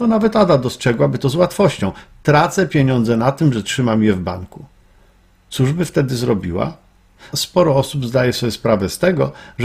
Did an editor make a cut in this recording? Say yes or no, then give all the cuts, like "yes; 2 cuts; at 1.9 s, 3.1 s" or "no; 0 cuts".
yes; 1 cut; at 7.3 s